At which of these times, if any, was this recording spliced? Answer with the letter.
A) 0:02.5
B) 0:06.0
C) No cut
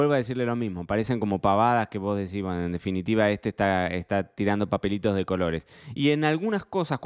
C